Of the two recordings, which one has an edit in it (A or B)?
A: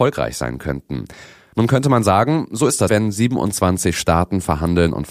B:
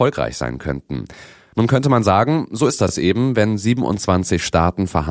A